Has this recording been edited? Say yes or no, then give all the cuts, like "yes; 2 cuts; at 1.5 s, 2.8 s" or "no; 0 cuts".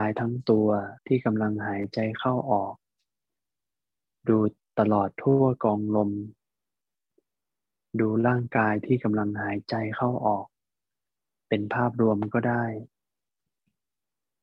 yes; 1 cut; at 1.0 s